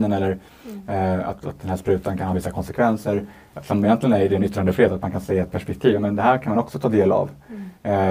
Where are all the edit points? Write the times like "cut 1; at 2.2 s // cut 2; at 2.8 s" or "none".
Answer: none